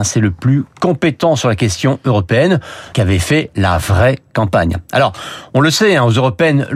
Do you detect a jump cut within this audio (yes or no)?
yes